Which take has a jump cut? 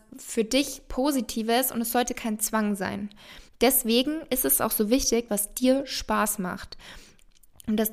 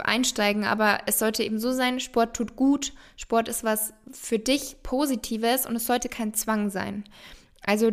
first; 2 cuts; at 3.5 s, 5.3 s

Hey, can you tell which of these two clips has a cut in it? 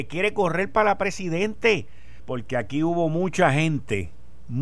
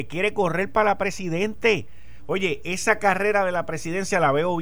first; 1 cut; at 2.2 s

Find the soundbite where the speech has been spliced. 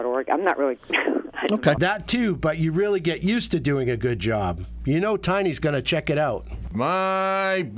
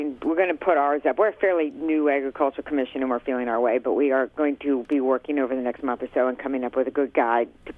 first; 1 cut; at 1.8 s

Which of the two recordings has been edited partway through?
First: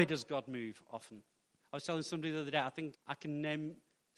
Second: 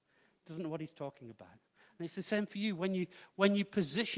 first; 1 cut; at 2.9 s

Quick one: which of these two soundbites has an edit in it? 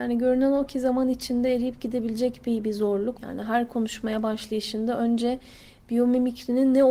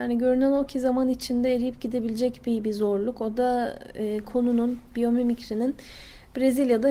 first; 1 cut; at 3.1 s

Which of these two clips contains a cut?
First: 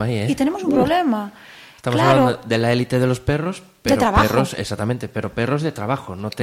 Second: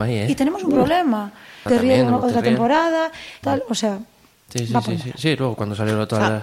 second; 2 cuts; at 1.7 s, 3.4 s

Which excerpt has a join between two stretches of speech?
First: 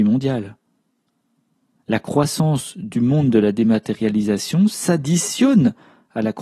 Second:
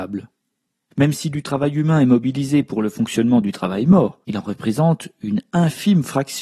second; 2 cuts; at 0.9 s, 4.2 s

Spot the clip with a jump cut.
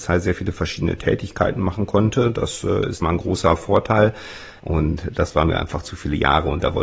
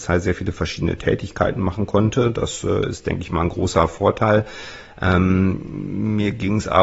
first; 2 cuts; at 3.0 s, 4.6 s

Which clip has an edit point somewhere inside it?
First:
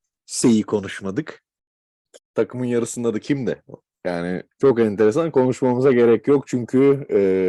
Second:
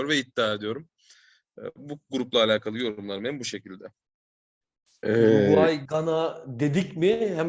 first; 2 cuts; at 2.2 s, 4.5 s

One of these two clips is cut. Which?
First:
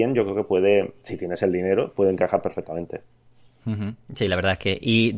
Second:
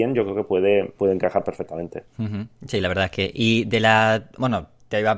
second; 2 cuts; at 1.0 s, 2.1 s

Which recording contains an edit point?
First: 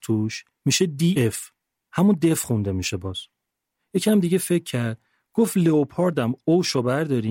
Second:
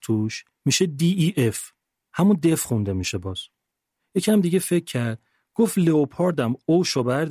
first; 1 cut; at 1.2 s

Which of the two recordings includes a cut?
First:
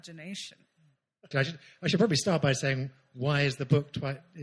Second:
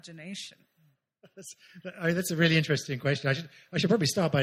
first; 1 cut; at 1.3 s

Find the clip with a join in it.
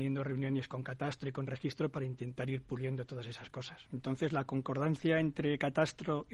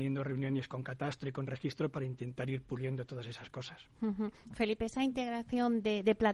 first; 1 cut; at 3.9 s

